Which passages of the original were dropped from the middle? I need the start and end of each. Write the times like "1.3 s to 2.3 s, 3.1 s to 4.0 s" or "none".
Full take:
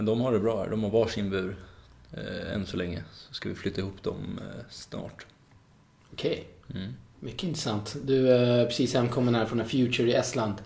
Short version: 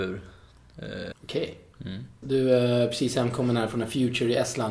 2.5 s to 6.0 s, 7.1 s to 8.0 s